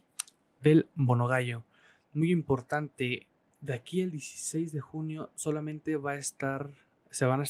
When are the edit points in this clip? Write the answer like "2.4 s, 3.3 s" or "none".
3.5 s